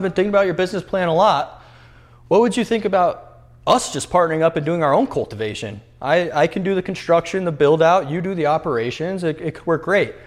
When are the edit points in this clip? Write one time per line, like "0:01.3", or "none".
none